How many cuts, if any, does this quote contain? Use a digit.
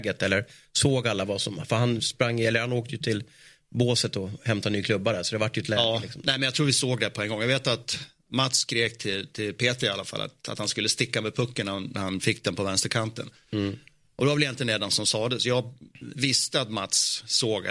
0